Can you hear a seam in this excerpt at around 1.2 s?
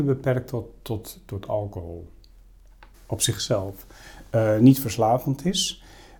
no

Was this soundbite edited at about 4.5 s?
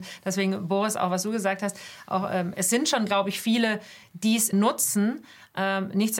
yes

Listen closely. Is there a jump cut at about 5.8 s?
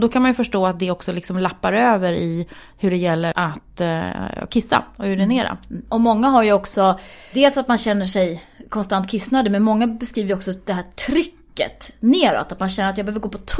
no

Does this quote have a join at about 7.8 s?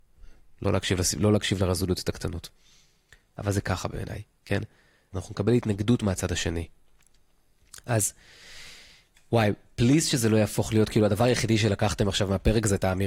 no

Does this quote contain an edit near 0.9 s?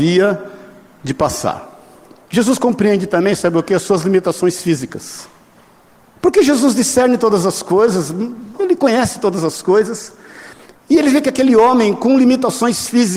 no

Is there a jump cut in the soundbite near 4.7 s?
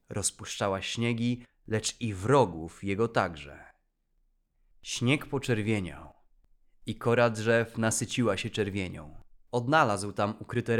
no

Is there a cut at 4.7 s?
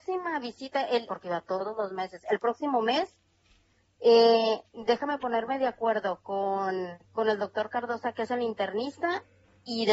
no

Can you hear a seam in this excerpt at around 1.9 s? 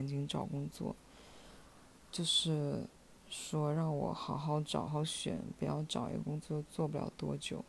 no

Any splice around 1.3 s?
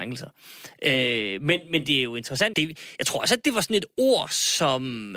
no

